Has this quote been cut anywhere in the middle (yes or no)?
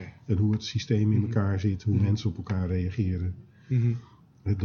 no